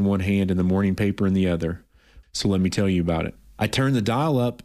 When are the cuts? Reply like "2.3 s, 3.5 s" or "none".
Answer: 2.2 s